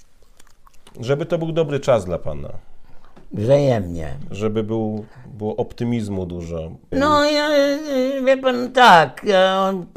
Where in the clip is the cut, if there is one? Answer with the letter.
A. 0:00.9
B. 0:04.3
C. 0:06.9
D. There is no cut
C